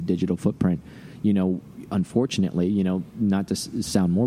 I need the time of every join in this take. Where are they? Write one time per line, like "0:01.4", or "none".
none